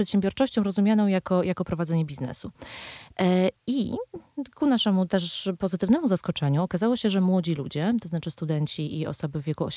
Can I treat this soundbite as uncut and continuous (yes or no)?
yes